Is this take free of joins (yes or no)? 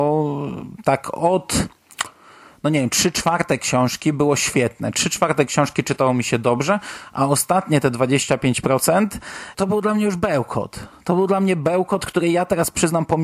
yes